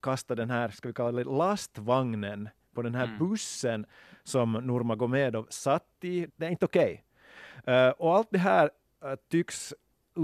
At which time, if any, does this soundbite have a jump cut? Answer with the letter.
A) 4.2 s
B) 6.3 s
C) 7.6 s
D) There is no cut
B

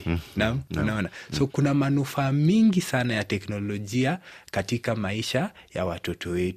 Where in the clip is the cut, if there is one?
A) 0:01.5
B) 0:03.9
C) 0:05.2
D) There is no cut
A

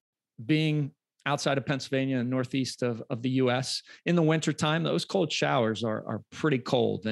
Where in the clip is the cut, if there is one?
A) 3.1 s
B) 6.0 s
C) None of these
C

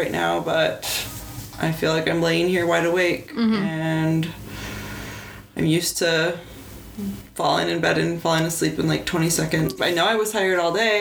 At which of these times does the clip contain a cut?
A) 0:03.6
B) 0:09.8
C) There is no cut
B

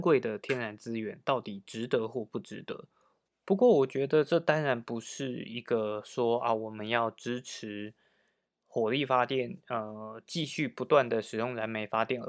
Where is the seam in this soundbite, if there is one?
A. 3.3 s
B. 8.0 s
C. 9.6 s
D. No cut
A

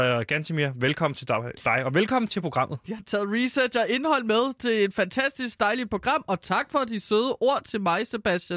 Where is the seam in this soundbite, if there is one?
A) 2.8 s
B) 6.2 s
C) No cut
A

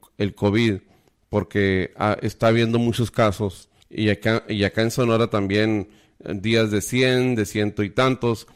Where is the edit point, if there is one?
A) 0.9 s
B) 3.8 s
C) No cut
B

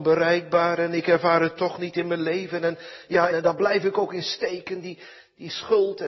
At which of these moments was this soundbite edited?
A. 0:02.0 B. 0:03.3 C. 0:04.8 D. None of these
B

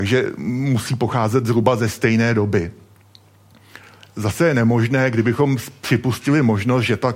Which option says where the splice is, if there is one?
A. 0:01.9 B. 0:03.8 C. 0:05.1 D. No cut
D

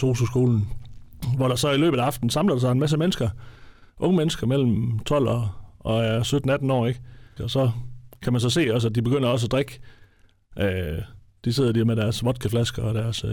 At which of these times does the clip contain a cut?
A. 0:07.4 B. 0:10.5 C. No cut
A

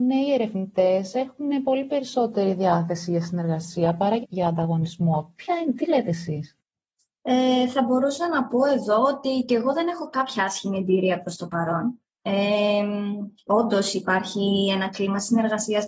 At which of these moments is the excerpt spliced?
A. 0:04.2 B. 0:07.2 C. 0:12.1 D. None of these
A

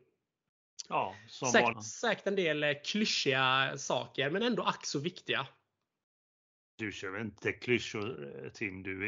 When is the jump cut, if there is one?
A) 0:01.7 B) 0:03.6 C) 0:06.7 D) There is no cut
A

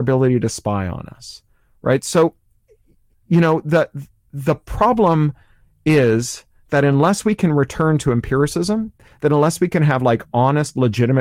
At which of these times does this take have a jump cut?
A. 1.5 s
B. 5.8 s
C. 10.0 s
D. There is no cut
D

